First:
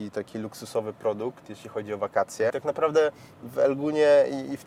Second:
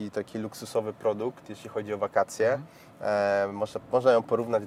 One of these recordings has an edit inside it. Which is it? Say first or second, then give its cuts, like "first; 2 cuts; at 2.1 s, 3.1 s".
first; 1 cut; at 2.5 s